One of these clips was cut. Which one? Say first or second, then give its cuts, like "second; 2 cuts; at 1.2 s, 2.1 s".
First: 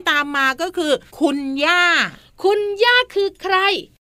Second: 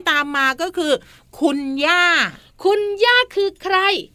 first; 1 cut; at 1.1 s